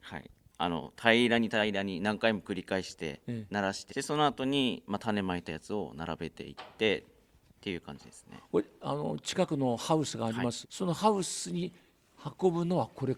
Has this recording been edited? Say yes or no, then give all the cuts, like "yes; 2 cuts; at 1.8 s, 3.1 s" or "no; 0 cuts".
yes; 2 cuts; at 3.9 s, 10.6 s